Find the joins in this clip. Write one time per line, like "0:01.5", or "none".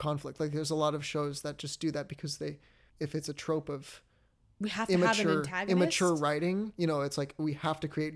0:02.9